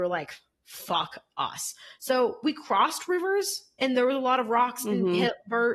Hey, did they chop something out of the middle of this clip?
no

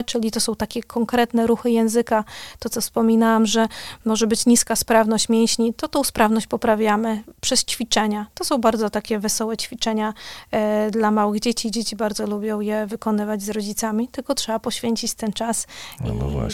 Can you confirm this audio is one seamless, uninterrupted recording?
yes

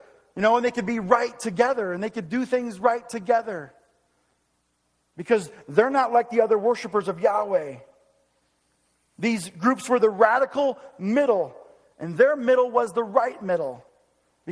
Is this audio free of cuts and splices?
yes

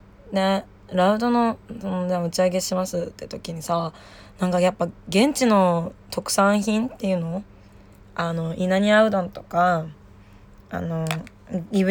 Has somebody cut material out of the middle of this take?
no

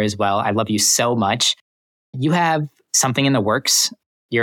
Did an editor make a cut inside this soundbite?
no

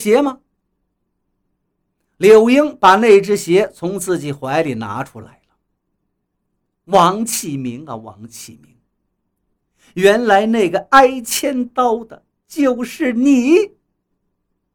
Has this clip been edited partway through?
no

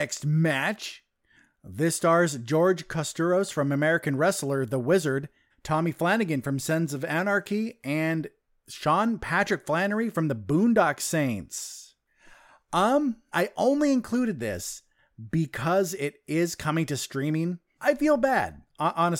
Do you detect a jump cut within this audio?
yes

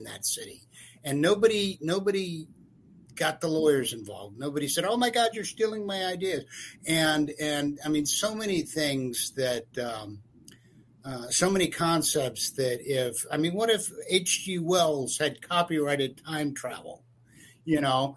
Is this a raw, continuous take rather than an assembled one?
yes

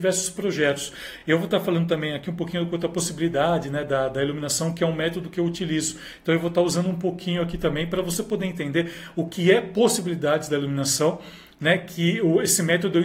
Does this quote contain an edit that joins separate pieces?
no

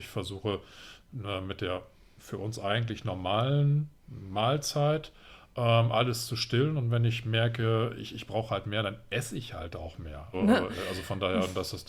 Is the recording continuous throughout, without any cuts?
no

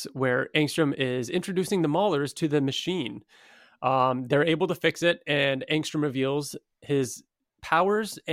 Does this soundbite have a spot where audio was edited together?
no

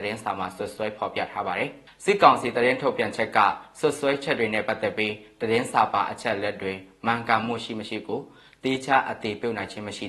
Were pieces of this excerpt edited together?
no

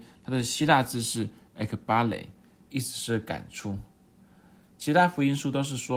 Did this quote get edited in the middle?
no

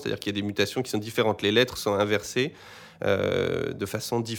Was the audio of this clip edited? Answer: no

